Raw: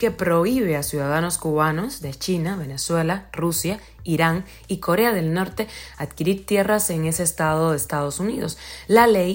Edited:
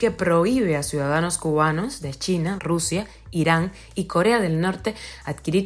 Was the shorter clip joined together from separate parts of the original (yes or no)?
yes